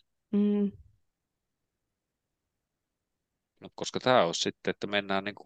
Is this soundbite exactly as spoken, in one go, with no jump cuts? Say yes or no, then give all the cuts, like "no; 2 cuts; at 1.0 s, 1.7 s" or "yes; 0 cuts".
no; 1 cut; at 3.7 s